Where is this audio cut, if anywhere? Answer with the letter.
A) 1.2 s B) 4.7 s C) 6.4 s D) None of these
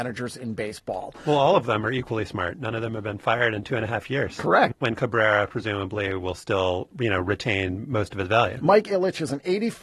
B